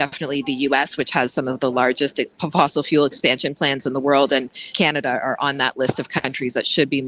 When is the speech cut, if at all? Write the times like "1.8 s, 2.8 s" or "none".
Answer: none